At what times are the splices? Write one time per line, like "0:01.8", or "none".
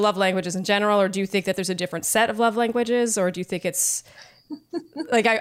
none